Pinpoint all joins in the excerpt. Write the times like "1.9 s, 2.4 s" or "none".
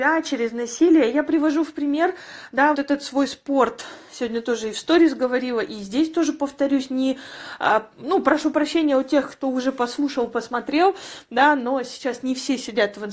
2.7 s